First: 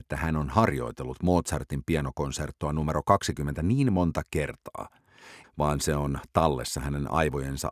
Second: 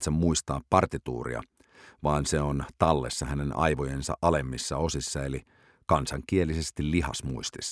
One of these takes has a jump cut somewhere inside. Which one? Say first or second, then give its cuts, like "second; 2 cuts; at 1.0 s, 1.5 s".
first; 1 cut; at 5.4 s